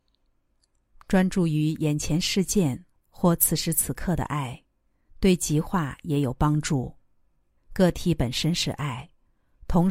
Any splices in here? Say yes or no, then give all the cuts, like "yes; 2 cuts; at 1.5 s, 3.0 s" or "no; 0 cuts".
yes; 1 cut; at 7.6 s